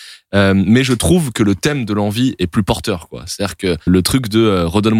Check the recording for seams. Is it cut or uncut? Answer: cut